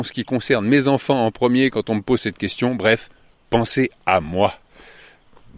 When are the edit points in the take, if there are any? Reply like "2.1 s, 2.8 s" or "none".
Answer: none